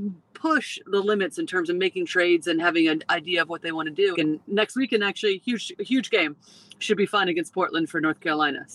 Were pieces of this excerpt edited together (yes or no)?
yes